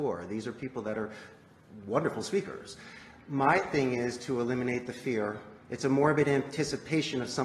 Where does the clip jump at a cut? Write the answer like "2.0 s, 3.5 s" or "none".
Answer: 5.6 s